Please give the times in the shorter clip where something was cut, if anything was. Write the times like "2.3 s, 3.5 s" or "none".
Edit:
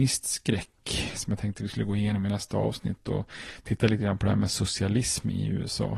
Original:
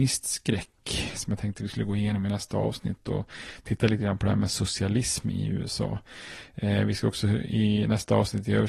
none